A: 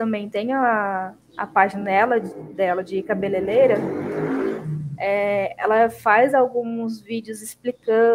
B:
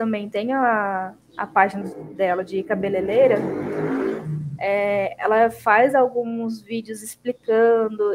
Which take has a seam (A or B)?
B